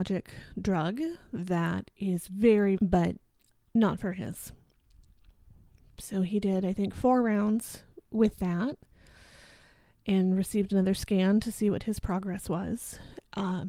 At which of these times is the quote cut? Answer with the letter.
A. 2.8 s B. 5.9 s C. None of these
A